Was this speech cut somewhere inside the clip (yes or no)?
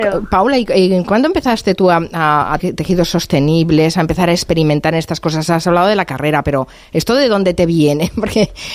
yes